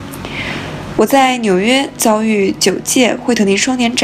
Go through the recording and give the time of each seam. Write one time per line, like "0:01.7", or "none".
none